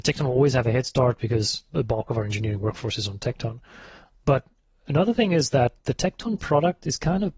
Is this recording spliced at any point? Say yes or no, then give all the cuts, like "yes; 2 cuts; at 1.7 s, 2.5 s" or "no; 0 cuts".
no; 0 cuts